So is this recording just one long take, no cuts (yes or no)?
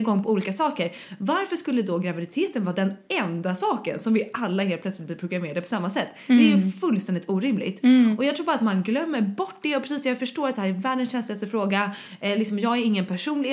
yes